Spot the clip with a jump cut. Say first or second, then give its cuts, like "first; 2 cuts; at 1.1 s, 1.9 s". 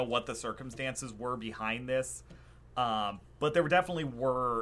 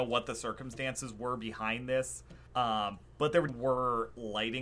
second; 2 cuts; at 2.5 s, 3.5 s